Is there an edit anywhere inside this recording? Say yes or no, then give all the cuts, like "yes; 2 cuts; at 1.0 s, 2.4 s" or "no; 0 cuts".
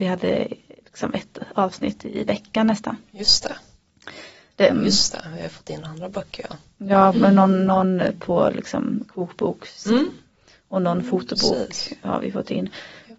yes; 1 cut; at 4.7 s